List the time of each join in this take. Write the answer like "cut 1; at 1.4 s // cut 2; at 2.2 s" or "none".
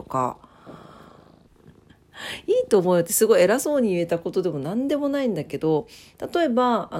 cut 1; at 1.5 s